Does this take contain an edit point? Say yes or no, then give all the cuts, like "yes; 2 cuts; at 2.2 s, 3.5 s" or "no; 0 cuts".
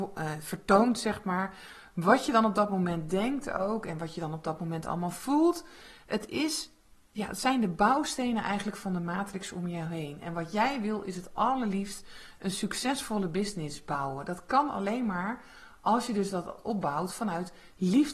no; 0 cuts